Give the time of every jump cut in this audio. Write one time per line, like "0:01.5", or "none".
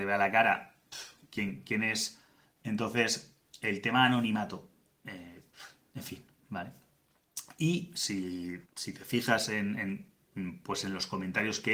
0:02.6
0:08.7